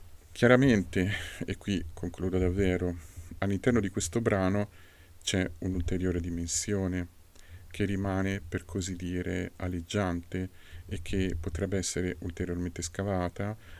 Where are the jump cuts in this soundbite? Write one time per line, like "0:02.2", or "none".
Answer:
0:03.4

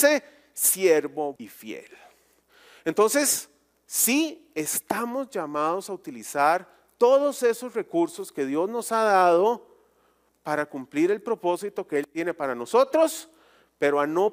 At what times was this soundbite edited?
0:01.4

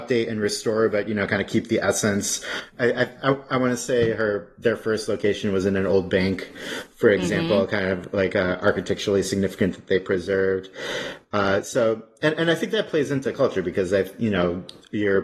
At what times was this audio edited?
none

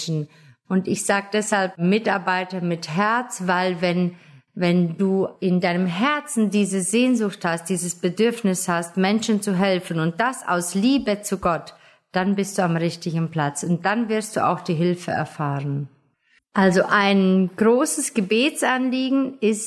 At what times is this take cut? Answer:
0:16.4

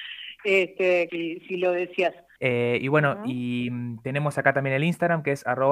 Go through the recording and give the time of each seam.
0:01.1
0:02.4

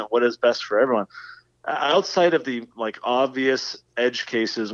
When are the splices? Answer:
none

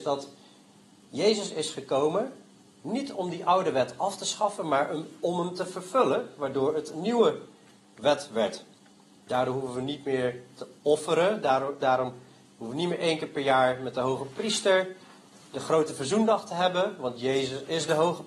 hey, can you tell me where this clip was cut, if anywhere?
0:11.8

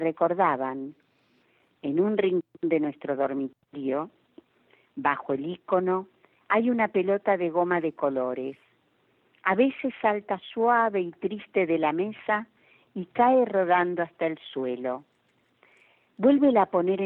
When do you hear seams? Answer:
none

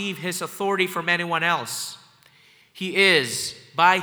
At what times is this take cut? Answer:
0:02.6

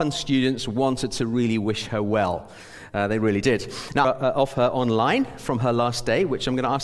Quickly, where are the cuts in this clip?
0:04.0

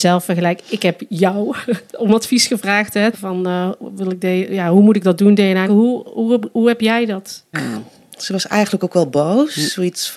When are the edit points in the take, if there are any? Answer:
0:03.1
0:05.7
0:07.5

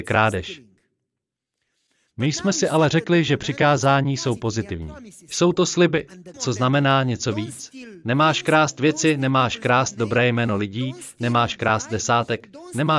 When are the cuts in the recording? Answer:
0:06.3

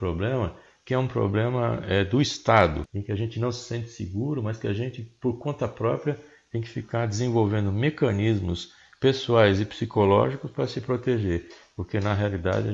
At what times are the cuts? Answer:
0:02.8

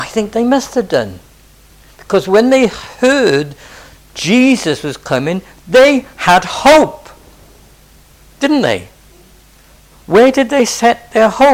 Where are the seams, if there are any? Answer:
none

